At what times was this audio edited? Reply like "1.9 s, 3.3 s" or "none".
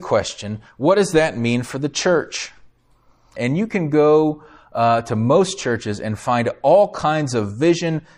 3.4 s